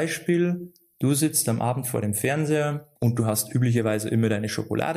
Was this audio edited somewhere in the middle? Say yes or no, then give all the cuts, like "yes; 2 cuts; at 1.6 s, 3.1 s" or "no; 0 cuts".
yes; 1 cut; at 3.0 s